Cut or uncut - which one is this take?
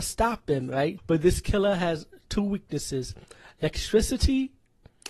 cut